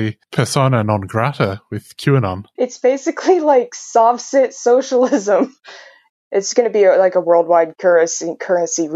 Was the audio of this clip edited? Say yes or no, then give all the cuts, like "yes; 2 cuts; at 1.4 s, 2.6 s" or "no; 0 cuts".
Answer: yes; 2 cuts; at 2.6 s, 6.1 s